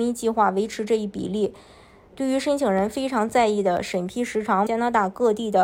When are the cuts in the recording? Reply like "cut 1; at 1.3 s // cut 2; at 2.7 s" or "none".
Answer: cut 1; at 2.1 s // cut 2; at 4.7 s